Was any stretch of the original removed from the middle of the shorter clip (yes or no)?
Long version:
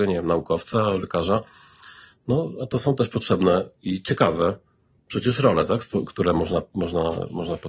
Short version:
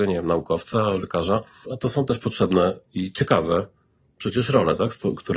yes